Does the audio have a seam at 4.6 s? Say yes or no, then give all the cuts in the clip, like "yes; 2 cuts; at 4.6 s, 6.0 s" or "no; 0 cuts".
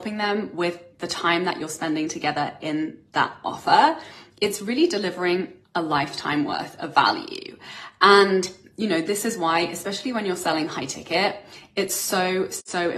no; 0 cuts